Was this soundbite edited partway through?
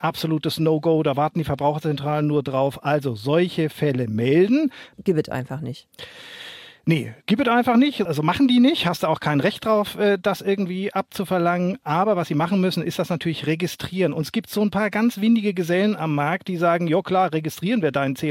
yes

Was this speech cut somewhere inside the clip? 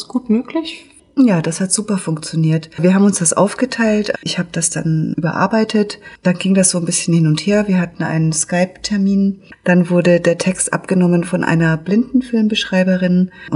yes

